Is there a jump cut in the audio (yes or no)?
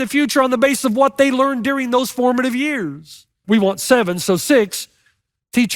yes